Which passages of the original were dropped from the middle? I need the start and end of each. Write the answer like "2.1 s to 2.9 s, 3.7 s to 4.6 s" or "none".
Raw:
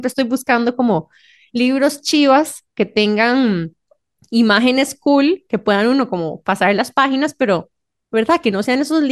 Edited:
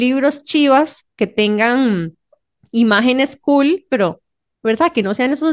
5.5 s to 7.4 s